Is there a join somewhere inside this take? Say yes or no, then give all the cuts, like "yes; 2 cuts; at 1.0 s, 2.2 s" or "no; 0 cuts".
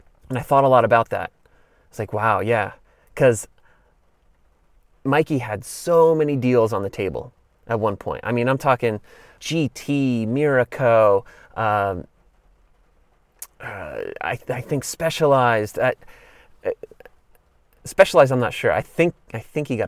yes; 1 cut; at 9.4 s